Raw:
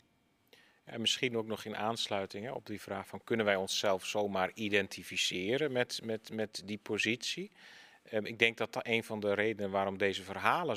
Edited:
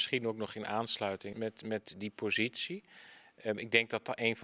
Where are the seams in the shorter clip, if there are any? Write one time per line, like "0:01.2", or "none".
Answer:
0:01.3